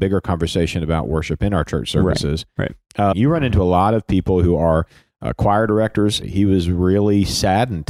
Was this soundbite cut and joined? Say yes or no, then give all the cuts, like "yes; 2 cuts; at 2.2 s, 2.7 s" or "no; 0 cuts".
yes; 2 cuts; at 3.1 s, 6.2 s